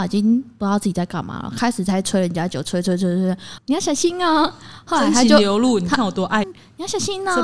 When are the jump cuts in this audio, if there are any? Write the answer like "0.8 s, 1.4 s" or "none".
3.6 s, 6.4 s